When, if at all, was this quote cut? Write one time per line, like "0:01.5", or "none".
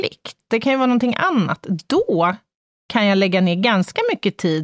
none